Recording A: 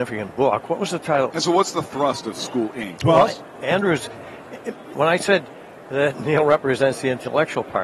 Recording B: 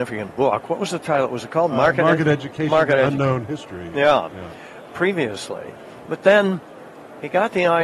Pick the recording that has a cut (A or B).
A